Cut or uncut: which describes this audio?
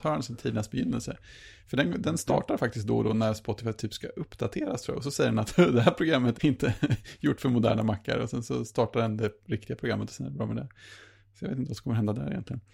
cut